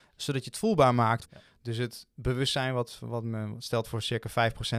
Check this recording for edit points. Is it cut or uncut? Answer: cut